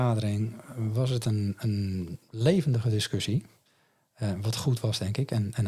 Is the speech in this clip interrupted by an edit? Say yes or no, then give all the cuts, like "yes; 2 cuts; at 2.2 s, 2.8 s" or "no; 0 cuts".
no; 0 cuts